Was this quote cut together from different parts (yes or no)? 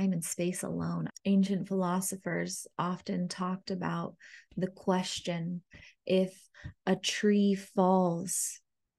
yes